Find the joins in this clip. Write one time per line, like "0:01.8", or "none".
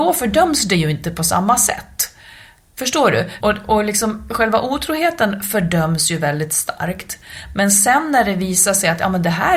0:03.4